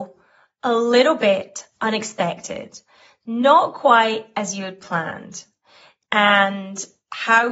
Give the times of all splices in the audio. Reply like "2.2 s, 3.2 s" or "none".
none